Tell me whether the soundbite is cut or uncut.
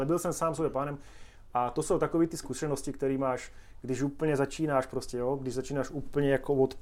uncut